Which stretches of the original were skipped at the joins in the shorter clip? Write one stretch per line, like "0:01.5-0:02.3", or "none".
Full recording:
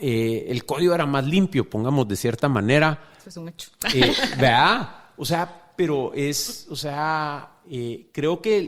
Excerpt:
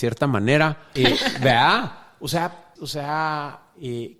0:03.2-0:03.9
0:05.7-0:06.6